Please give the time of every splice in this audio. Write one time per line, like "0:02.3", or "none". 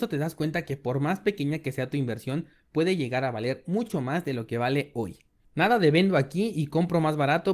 0:05.4